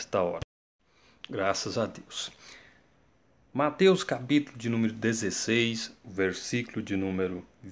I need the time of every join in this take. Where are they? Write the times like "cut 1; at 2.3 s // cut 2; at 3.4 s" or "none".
none